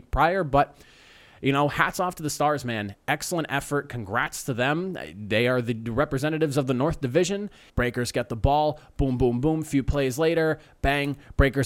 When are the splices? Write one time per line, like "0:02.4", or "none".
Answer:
0:07.7